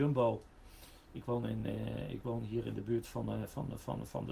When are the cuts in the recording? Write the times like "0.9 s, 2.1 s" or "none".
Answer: none